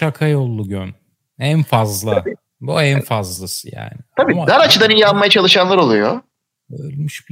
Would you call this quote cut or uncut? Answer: uncut